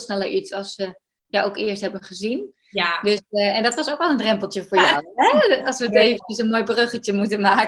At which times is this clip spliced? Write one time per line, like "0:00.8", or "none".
none